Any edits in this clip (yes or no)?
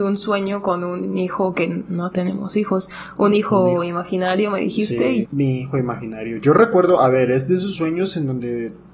yes